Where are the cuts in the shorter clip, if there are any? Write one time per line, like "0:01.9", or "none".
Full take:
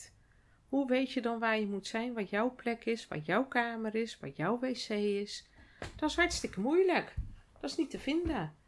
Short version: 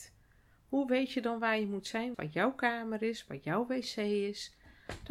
0:02.1